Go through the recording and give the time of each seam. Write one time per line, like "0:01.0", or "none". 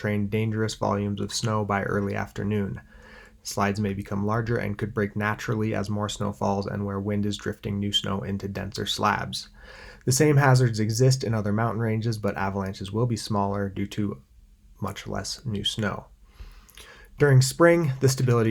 0:03.3